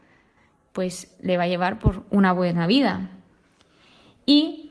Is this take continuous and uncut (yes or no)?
yes